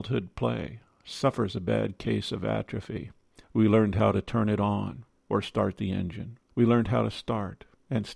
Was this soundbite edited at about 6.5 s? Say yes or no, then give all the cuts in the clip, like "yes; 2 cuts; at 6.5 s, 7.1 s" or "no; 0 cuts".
yes; 2 cuts; at 3.4 s, 6.5 s